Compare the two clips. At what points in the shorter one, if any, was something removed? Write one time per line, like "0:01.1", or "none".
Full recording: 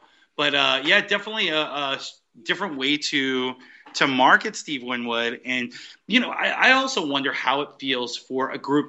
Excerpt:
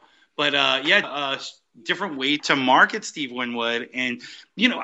0:01.0
0:02.4